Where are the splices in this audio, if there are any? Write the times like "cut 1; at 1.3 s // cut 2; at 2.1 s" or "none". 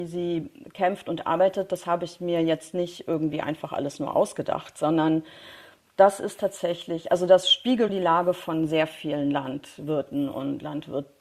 cut 1; at 7.9 s

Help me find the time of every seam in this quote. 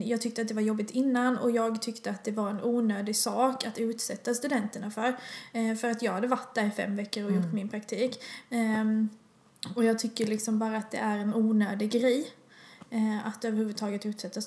cut 1; at 8.5 s

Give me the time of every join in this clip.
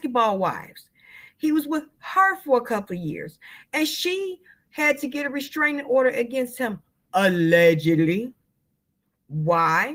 none

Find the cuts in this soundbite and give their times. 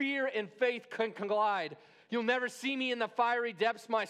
none

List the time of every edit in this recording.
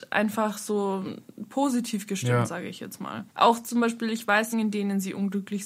cut 1; at 3.3 s // cut 2; at 4.5 s

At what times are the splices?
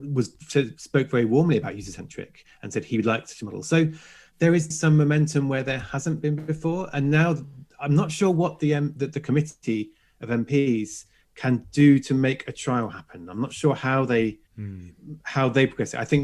cut 1; at 4.7 s // cut 2; at 14.5 s

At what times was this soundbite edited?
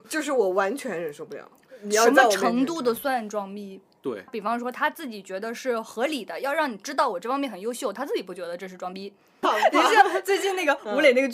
cut 1; at 4.3 s // cut 2; at 9.4 s

